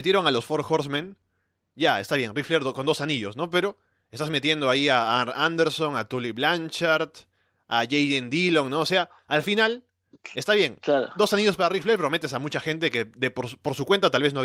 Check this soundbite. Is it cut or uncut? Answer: uncut